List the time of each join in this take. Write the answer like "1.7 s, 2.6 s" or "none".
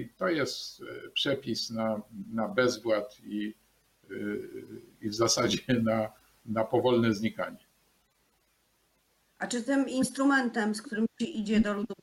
none